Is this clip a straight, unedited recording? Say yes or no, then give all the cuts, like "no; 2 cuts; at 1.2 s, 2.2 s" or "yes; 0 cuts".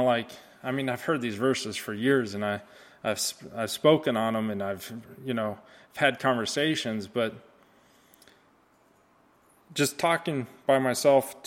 yes; 0 cuts